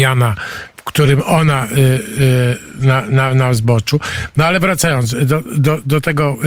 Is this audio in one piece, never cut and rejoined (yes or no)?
yes